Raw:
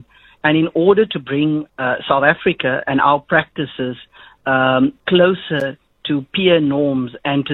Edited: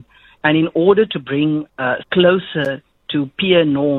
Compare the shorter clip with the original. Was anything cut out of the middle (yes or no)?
yes